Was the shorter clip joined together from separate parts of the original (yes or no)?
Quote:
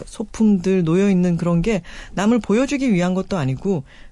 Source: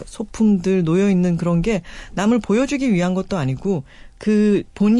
no